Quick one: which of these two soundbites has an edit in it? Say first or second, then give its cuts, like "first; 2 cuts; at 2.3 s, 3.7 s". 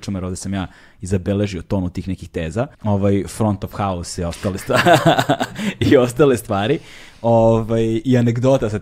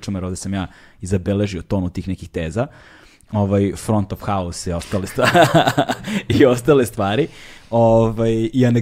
first; 1 cut; at 2.7 s